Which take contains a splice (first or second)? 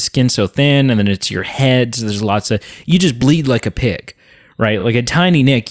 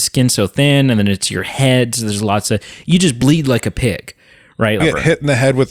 second